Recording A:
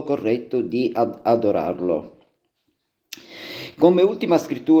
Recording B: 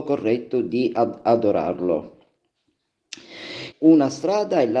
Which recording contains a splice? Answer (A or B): B